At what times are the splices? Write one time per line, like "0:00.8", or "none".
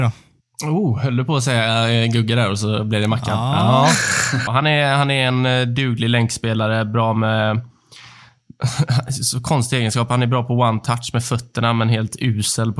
0:04.5